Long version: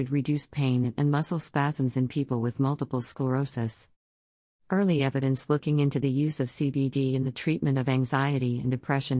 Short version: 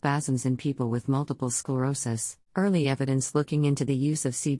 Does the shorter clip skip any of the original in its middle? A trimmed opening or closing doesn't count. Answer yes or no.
yes